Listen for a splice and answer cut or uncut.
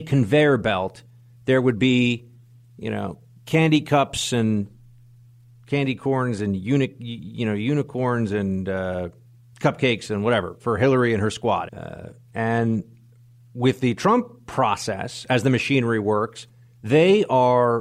cut